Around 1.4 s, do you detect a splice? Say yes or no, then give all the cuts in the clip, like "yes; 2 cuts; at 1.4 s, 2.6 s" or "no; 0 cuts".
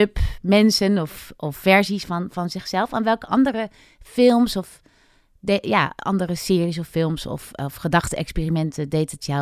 no; 0 cuts